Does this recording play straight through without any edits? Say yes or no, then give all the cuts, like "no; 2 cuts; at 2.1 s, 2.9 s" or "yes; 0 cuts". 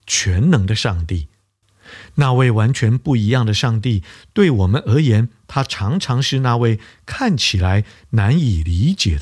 yes; 0 cuts